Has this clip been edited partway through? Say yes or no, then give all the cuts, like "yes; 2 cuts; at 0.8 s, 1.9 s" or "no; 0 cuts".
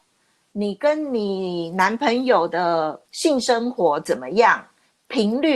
yes; 1 cut; at 3.0 s